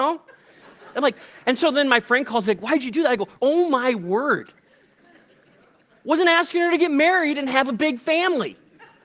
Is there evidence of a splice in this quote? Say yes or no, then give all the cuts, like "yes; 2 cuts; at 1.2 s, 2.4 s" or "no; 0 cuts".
yes; 2 cuts; at 0.9 s, 3.4 s